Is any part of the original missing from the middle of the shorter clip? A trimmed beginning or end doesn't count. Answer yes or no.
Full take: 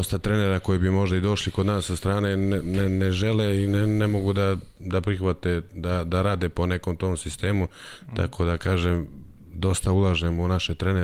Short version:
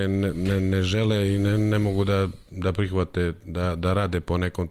no